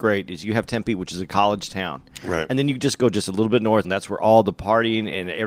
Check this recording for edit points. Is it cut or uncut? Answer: cut